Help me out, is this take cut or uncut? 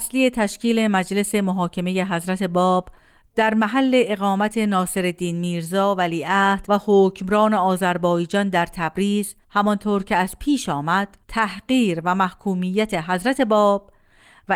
cut